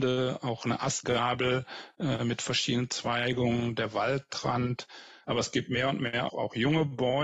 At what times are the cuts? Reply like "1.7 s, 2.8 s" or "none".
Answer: 5.2 s, 6.3 s